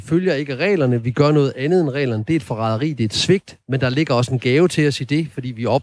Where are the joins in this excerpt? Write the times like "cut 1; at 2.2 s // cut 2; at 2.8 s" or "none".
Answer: none